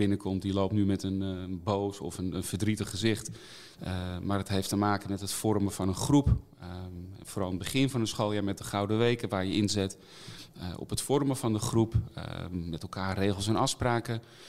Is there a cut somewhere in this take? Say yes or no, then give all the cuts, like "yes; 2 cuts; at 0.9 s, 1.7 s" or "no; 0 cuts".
yes; 1 cut; at 3.8 s